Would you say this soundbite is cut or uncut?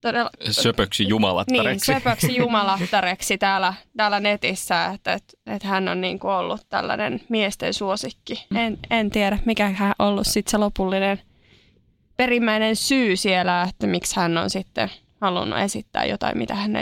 cut